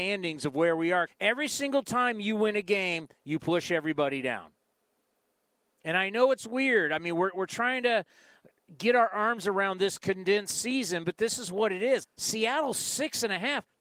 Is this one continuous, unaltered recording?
no; 2 cuts; at 1.1 s, 12.0 s

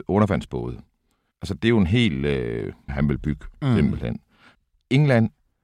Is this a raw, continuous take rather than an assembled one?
no; 1 cut; at 2.9 s

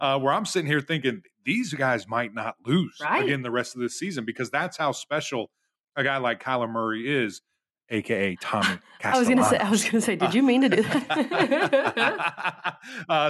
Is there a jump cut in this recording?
no; 0 cuts

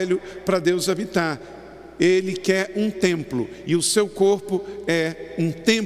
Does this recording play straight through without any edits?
yes; 0 cuts

